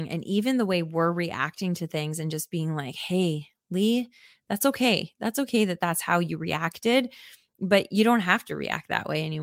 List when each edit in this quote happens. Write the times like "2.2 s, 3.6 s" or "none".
none

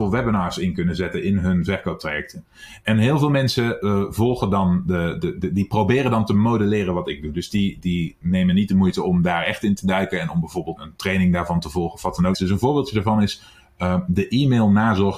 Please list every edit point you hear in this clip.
10.8 s, 12.3 s

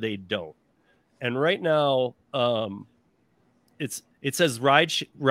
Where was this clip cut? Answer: 4.1 s

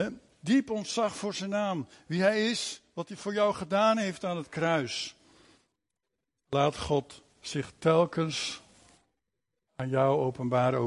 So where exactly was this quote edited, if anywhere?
none

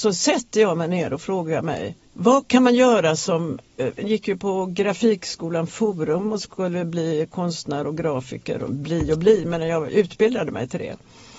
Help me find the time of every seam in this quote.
2.0 s, 4.0 s

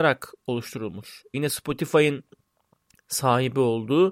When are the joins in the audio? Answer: 1.3 s

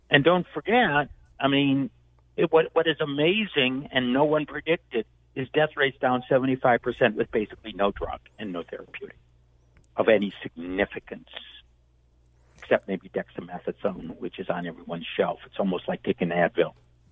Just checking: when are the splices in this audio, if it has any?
none

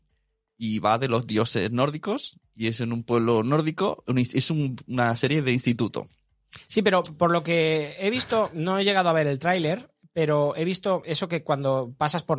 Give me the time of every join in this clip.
none

